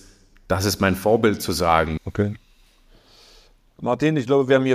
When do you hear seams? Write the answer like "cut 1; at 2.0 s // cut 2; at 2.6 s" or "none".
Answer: cut 1; at 2.0 s